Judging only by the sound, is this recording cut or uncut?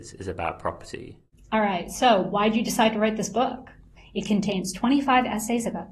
cut